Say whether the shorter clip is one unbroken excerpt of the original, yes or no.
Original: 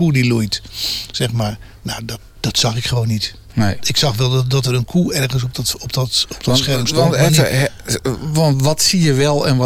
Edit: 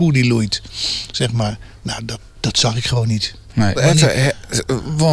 no